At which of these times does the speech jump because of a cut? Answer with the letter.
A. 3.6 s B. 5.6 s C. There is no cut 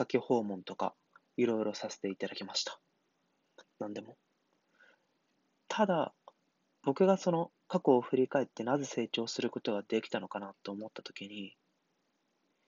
A